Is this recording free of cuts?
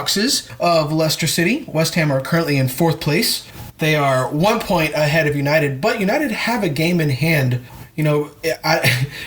yes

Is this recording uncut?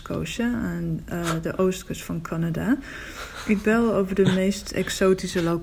yes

